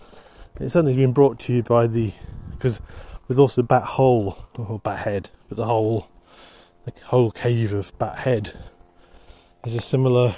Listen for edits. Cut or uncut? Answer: uncut